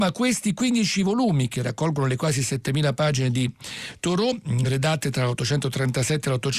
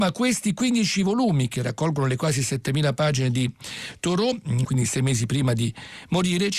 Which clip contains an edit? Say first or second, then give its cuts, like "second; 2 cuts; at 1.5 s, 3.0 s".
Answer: second; 1 cut; at 4.6 s